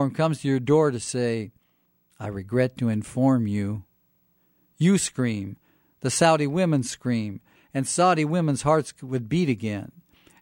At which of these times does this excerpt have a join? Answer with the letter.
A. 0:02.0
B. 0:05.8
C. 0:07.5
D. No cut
C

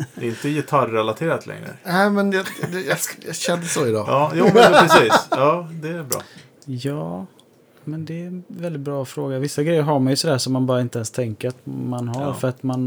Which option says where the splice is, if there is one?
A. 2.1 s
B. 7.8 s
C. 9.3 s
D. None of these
D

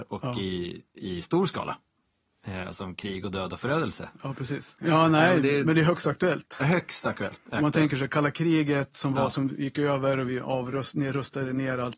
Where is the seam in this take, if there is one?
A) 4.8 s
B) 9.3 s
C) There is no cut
A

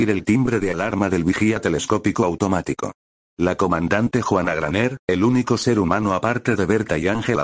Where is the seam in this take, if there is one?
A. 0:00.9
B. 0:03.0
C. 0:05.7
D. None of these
D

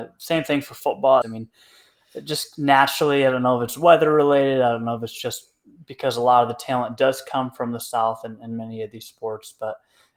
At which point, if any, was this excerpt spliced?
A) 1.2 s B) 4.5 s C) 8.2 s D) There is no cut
A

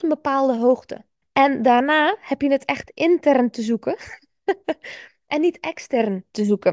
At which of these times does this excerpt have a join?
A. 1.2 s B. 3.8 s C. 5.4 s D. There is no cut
A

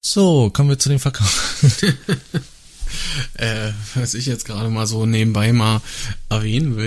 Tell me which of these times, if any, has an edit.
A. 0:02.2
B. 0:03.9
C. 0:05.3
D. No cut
D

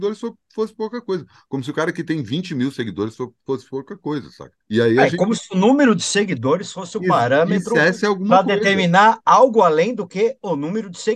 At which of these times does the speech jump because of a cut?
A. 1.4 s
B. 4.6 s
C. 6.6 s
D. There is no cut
B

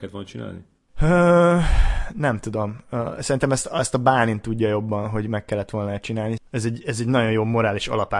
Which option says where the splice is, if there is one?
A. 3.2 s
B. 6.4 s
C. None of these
B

